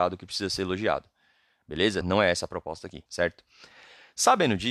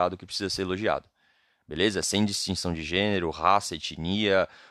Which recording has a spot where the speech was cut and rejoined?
first; 2 cuts; at 2.0 s, 3.1 s

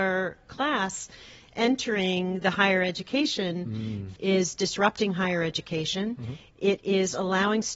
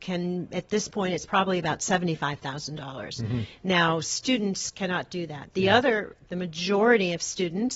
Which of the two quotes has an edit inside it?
first; 2 cuts; at 4.2 s, 6.5 s

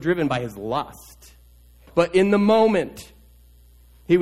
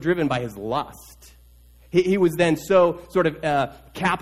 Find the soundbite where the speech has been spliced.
first; 1 cut; at 1.9 s

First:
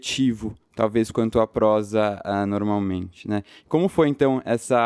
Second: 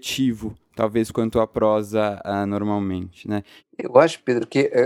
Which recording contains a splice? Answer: second; 1 cut; at 3.6 s

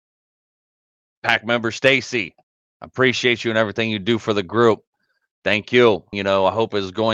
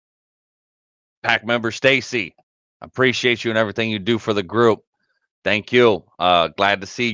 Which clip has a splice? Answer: first; 1 cut; at 6.1 s

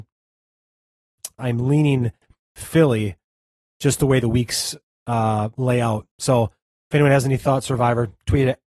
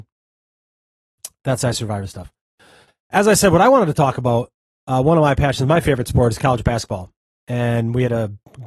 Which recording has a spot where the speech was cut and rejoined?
first; 2 cuts; at 1.4 s, 6.1 s

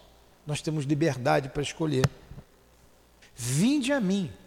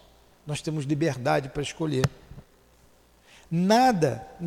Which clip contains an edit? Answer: first; 1 cut; at 3.2 s

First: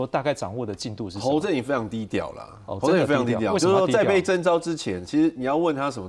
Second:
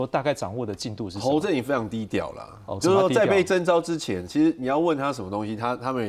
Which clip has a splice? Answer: second; 1 cut; at 2.8 s

